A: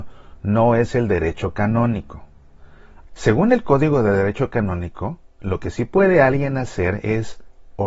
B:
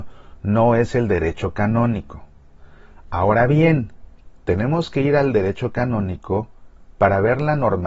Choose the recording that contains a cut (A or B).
A